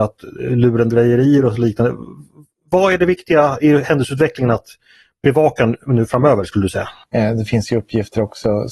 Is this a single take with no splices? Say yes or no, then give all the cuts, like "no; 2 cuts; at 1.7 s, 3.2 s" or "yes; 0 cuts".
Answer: no; 1 cut; at 7.0 s